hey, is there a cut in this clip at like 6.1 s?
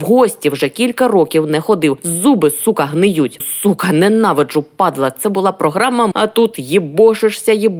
yes; 2 cuts; at 3.4 s, 6.1 s

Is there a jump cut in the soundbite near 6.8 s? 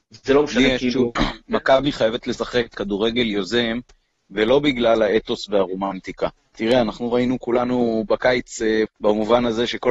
no; 3 cuts; at 1.2 s, 2.7 s, 8.9 s

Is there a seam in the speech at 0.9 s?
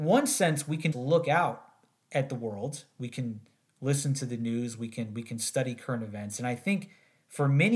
yes; 1 cut; at 0.9 s

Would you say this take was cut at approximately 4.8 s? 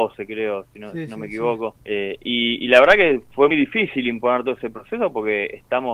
no; 2 cuts; at 1.8 s, 3.5 s

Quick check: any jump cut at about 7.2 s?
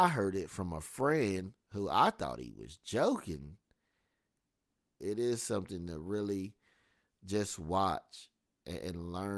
no; 1 cut; at 5.0 s

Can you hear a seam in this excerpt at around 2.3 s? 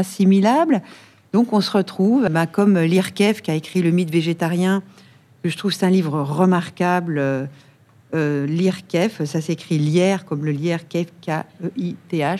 yes; 1 cut; at 2.3 s

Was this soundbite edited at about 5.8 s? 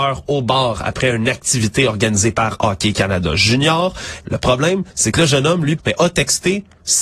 yes; 2 cuts; at 4.2 s, 5.8 s

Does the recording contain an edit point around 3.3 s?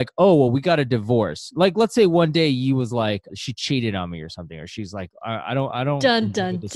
yes; 1 cut; at 3.3 s

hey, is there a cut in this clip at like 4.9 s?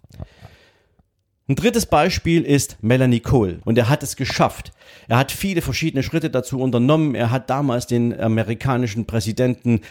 no; 1 cut; at 3.6 s

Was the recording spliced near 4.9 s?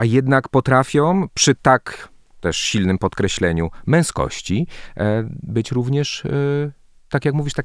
no; 0 cuts

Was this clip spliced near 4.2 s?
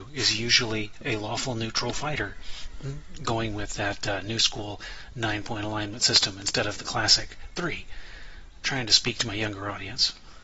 no; 0 cuts

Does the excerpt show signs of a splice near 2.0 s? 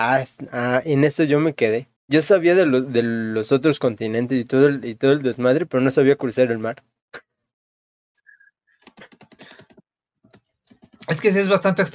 yes; 2 cuts; at 2.0 s, 8.1 s

